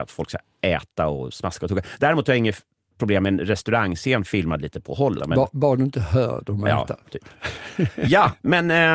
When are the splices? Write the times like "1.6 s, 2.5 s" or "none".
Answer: 5.2 s